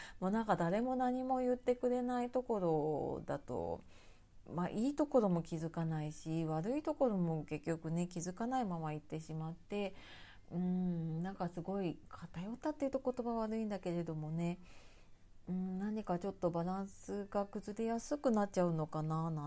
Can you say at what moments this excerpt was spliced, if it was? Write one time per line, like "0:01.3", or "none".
0:12.1